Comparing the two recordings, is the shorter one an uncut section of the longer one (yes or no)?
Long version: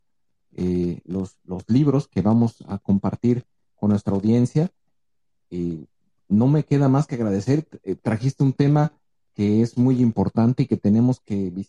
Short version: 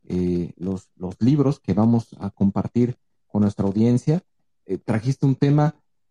no